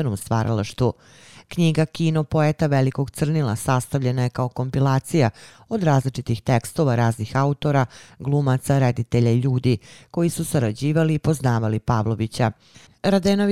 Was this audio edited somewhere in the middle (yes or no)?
no